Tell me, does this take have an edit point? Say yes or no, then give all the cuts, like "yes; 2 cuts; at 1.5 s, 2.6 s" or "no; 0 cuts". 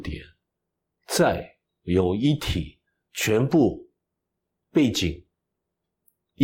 no; 0 cuts